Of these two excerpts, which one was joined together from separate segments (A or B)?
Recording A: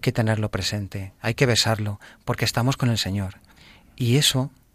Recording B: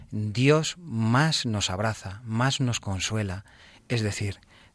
B